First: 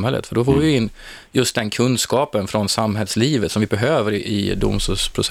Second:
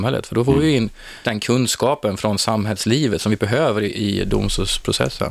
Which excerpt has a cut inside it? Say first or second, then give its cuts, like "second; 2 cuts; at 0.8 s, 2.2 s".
second; 1 cut; at 1.2 s